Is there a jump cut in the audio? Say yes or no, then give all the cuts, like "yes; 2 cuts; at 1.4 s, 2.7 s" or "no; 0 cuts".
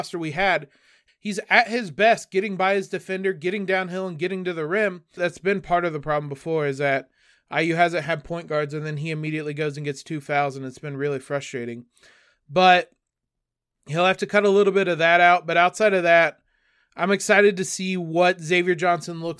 yes; 2 cuts; at 1.1 s, 5.2 s